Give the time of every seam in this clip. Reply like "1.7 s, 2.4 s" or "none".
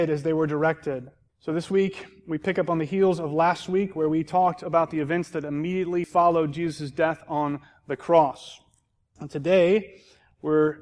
1.3 s